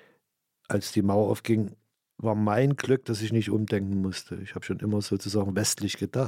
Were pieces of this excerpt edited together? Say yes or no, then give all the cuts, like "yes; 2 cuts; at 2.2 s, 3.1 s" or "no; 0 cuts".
no; 0 cuts